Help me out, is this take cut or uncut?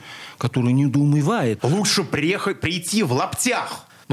cut